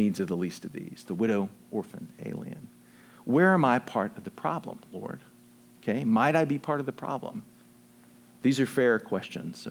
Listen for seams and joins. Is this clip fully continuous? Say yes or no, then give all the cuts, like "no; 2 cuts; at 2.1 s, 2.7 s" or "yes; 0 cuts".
yes; 0 cuts